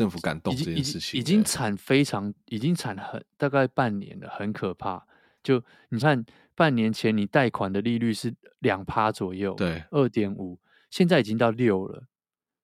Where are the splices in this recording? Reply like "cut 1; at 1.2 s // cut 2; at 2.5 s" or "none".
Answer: cut 1; at 6.0 s